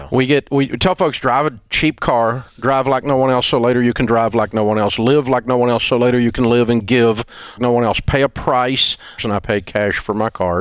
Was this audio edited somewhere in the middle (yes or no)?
yes